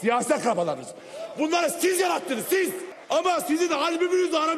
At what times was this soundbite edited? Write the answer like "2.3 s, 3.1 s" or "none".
3.0 s